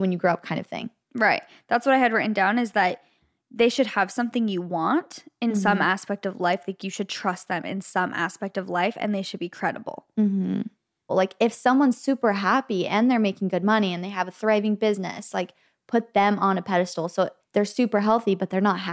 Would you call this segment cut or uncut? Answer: cut